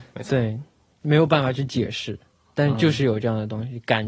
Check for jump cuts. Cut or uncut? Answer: uncut